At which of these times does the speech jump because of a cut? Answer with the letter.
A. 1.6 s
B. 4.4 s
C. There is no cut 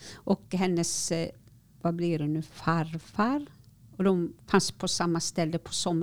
B